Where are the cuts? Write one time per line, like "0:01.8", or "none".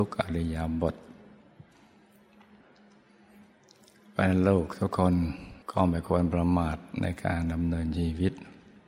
0:05.6